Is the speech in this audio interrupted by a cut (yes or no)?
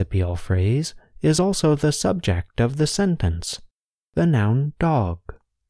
no